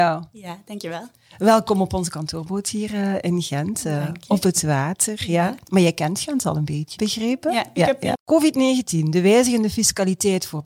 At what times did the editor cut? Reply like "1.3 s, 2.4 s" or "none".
7.0 s, 8.2 s